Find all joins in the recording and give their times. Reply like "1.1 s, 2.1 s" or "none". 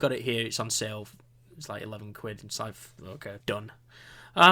3.4 s